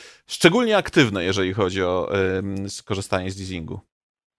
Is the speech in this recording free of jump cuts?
yes; 0 cuts

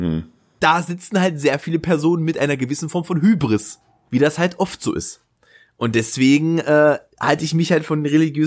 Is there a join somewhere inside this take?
yes; 1 cut; at 4.1 s

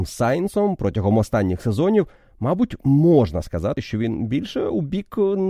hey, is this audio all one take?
yes; 0 cuts

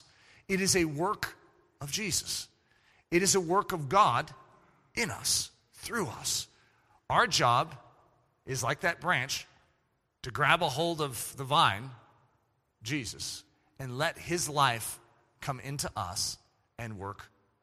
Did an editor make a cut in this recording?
no; 0 cuts

